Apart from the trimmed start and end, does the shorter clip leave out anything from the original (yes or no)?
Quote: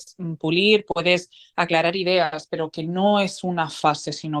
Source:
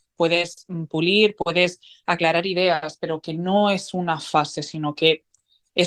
no